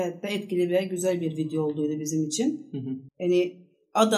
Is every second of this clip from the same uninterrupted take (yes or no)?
no